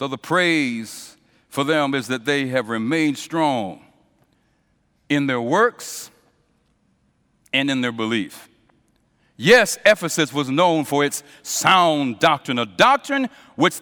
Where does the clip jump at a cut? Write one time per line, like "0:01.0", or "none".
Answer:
0:09.2